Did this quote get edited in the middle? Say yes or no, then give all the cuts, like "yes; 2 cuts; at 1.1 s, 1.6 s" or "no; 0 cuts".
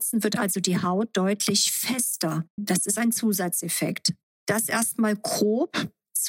yes; 1 cut; at 2.6 s